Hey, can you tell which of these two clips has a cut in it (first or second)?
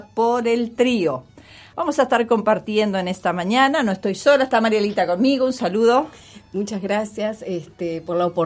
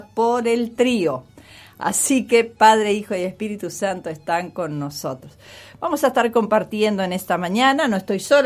first